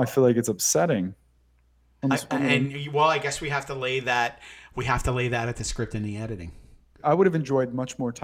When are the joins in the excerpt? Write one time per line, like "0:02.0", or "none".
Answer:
0:02.0
0:07.0